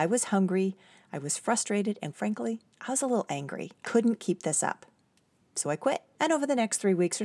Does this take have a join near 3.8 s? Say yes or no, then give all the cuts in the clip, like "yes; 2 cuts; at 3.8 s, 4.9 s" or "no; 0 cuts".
yes; 3 cuts; at 2.1 s, 3.8 s, 6.1 s